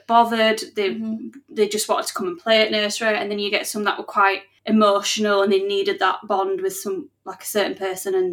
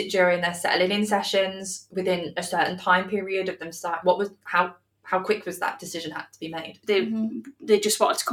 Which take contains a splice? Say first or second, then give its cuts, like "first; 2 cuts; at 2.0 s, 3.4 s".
second; 2 cuts; at 4.0 s, 6.8 s